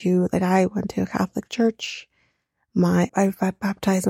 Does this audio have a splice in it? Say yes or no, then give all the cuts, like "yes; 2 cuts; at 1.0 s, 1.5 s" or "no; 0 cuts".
yes; 1 cut; at 3.1 s